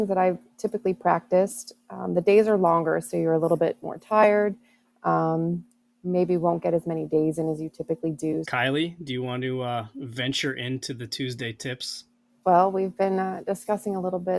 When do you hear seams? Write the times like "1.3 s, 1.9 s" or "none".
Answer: 8.4 s, 12.4 s